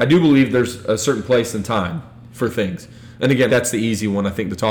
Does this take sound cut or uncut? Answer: cut